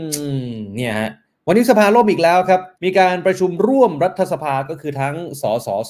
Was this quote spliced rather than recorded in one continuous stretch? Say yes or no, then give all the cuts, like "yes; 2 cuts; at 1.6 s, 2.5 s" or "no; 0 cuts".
yes; 1 cut; at 2.7 s